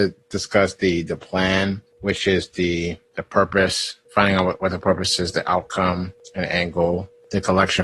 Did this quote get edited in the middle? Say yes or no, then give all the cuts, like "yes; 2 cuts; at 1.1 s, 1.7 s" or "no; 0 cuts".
no; 0 cuts